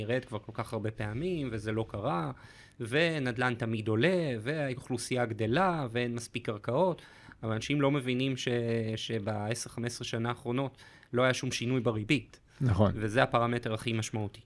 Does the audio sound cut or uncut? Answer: uncut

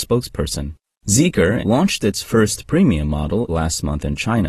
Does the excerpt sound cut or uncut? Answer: cut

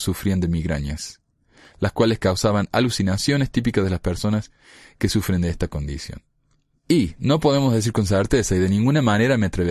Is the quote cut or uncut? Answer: cut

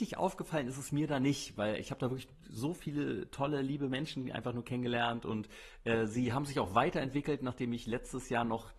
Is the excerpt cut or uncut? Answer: uncut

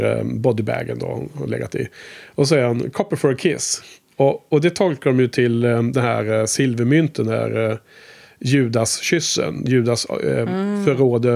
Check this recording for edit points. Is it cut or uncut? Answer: uncut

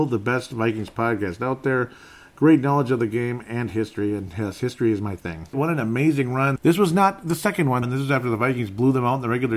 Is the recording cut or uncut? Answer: cut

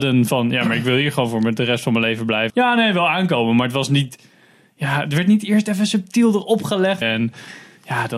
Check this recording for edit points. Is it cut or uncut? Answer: cut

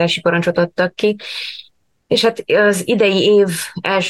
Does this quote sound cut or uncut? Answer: uncut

